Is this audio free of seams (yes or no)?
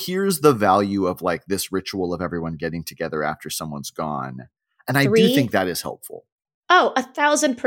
yes